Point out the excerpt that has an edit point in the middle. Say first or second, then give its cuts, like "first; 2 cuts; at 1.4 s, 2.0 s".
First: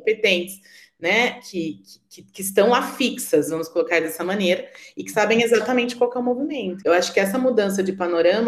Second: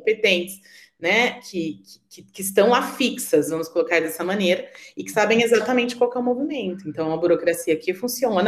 first; 1 cut; at 6.8 s